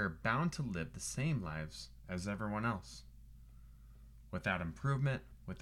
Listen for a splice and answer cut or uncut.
uncut